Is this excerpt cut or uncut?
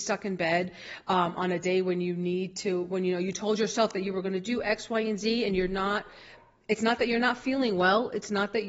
uncut